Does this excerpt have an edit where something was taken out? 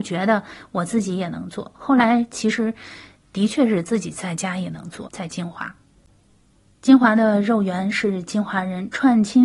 yes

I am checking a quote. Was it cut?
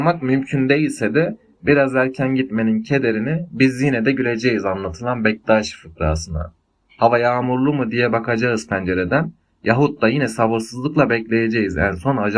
no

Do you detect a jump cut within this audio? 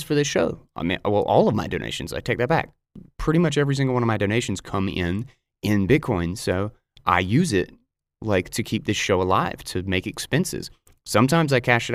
no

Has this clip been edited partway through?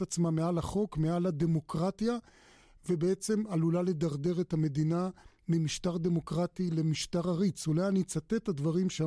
no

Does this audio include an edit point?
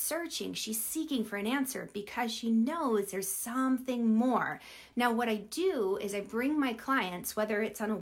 yes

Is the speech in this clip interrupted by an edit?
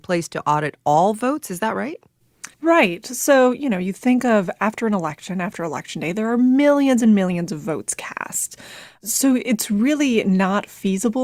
yes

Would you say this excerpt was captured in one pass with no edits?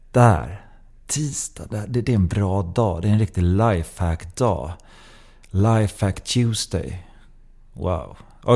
yes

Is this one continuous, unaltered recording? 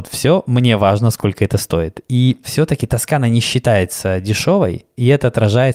yes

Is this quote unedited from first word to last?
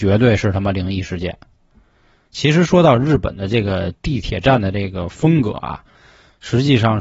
yes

